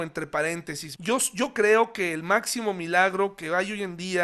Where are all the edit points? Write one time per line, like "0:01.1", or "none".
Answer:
0:01.0